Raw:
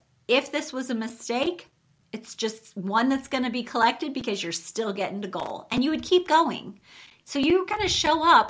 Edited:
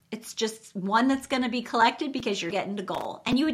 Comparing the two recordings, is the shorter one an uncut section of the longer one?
no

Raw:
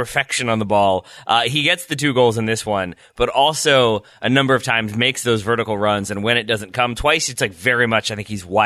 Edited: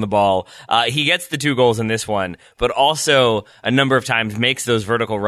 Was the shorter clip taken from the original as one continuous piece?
yes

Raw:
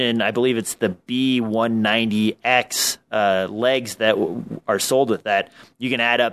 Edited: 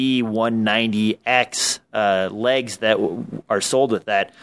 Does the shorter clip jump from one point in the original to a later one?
no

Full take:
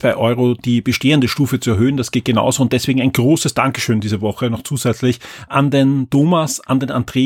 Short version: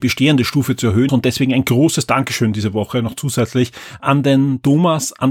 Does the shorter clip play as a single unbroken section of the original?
no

